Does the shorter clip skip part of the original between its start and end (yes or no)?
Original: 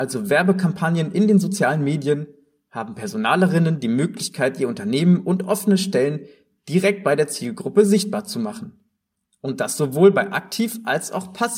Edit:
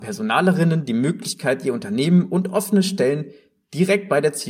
no